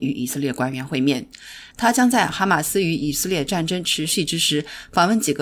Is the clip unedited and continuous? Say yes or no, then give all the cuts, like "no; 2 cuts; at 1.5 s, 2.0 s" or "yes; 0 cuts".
no; 1 cut; at 1.7 s